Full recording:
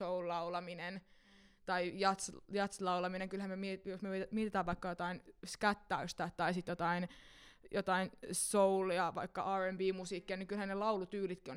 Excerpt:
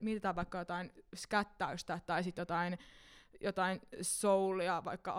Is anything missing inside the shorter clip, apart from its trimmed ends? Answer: no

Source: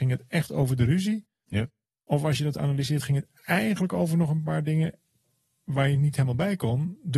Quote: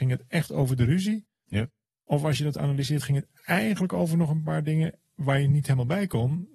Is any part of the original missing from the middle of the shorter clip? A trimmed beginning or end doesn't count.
yes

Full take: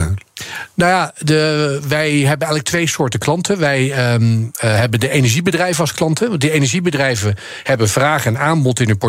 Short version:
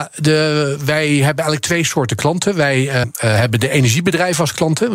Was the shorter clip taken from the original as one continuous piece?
no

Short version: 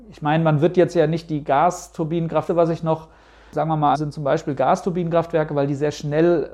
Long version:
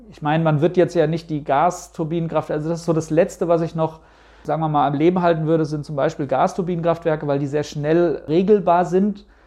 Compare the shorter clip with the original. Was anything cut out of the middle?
yes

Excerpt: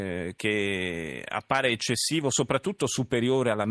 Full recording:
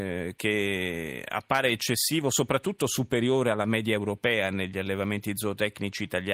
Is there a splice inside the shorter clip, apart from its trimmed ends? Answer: no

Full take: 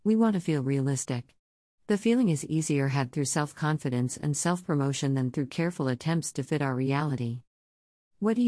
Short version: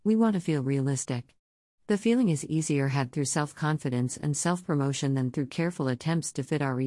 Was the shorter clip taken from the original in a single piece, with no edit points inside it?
yes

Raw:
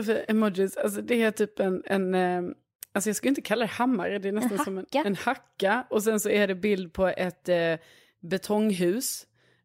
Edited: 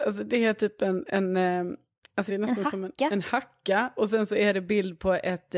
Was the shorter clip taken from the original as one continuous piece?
no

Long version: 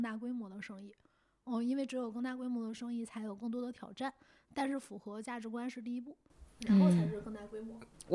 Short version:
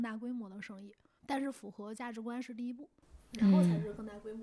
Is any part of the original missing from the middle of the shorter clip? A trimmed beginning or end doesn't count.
yes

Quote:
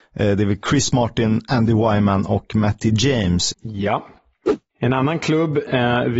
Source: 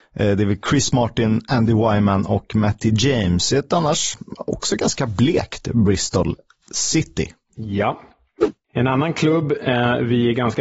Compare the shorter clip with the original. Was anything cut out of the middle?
yes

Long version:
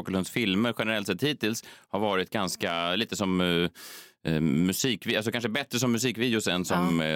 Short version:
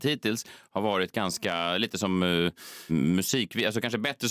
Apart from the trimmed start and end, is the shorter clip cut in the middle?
yes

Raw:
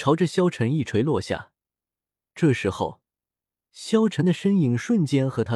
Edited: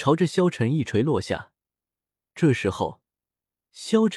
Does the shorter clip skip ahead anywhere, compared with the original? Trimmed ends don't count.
no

